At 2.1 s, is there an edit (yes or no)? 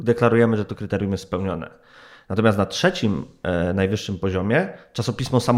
no